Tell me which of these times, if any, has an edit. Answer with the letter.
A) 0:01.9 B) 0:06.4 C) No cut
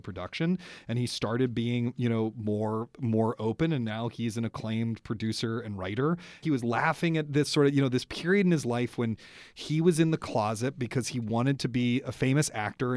B